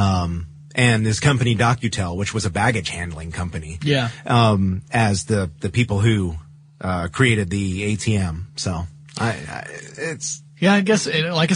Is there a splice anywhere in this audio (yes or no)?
no